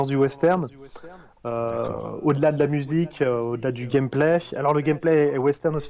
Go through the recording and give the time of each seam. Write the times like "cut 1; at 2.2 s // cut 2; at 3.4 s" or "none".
none